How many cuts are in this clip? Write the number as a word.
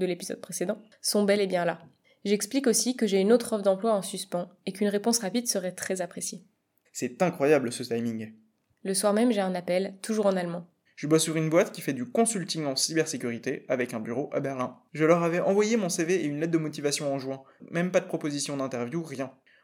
two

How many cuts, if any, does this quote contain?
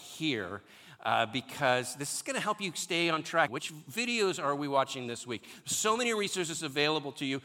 one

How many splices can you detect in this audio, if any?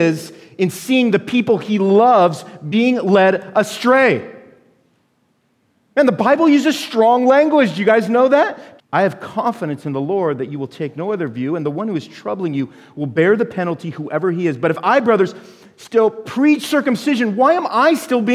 one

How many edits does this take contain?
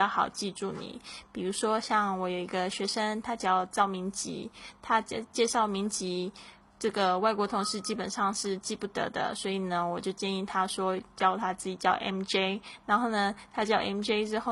zero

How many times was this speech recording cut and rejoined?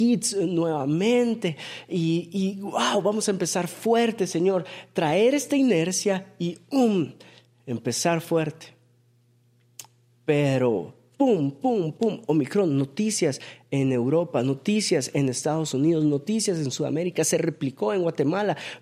zero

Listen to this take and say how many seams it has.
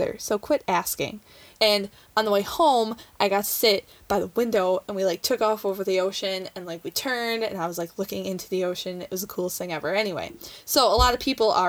one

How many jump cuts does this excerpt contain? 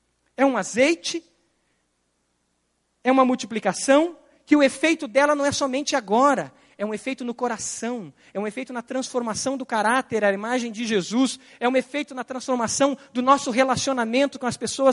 zero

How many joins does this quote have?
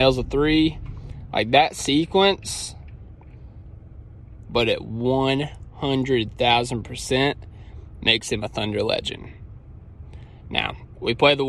one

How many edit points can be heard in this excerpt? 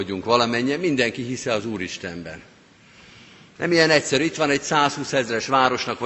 one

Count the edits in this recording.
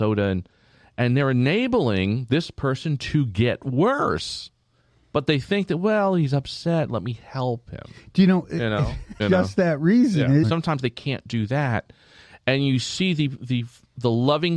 three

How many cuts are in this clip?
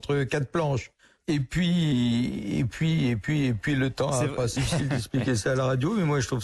one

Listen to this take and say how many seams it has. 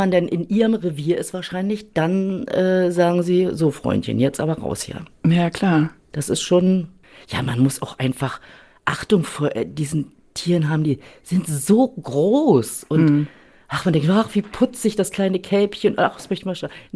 zero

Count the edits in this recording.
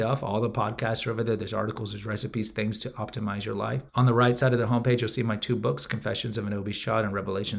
one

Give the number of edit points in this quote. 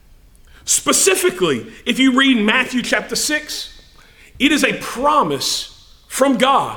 zero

